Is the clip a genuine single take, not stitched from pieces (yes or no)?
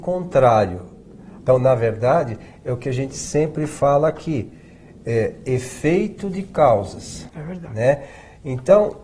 no